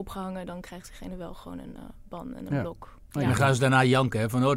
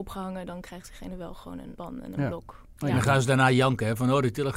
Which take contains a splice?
second; 1 cut; at 1.8 s

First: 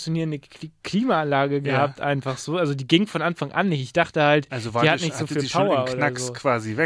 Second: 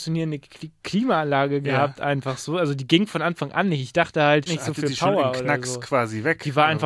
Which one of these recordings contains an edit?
second; 1 cut; at 4.5 s

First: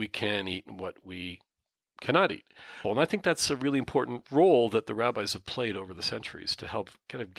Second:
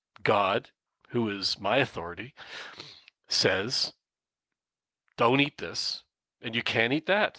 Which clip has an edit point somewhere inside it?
first; 1 cut; at 2.8 s

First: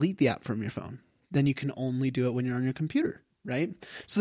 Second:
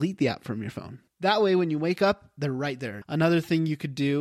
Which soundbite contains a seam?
second; 2 cuts; at 1.1 s, 3.0 s

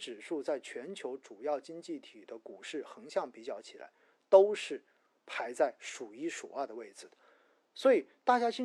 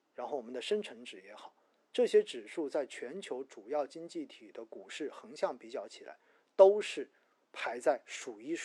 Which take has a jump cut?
second; 1 cut; at 1.9 s

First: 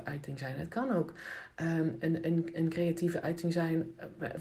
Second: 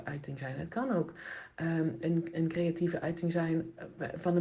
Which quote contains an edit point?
second; 1 cut; at 2.0 s

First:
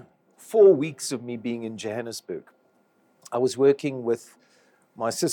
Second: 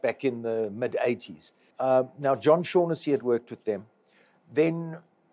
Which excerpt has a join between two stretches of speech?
second; 1 cut; at 1.7 s

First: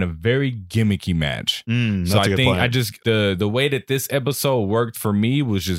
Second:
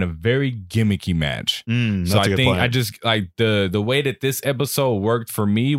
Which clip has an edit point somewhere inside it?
first; 1 cut; at 3.0 s

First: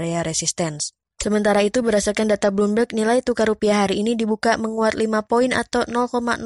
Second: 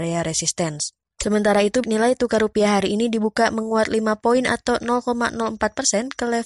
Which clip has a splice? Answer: second; 1 cut; at 1.8 s

